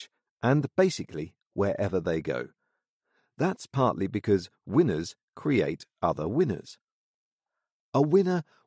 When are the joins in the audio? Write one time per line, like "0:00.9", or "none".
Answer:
none